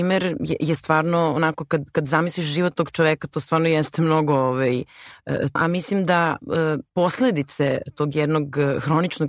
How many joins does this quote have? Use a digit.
2